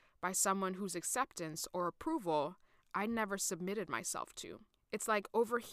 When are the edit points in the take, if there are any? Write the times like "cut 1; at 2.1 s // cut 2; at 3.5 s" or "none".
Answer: none